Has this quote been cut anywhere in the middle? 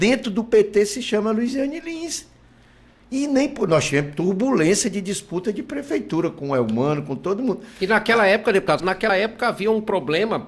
yes; 1 cut; at 8.8 s

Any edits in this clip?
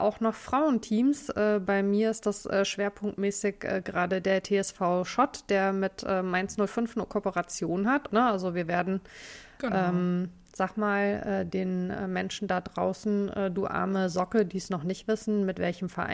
yes; 1 cut; at 8.1 s

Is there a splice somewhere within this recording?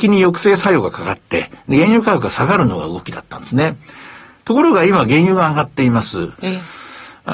yes; 1 cut; at 6.4 s

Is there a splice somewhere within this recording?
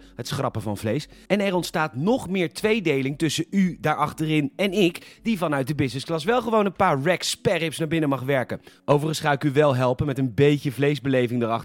no; 0 cuts

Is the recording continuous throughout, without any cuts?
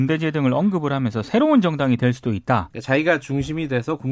no; 1 cut; at 2.7 s

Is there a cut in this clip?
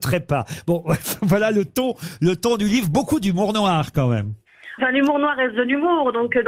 yes; 1 cut; at 4.8 s

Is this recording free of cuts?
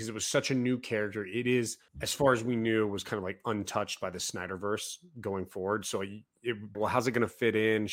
no; 2 cuts; at 1.9 s, 6.7 s

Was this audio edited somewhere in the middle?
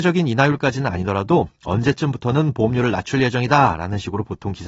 no; 0 cuts

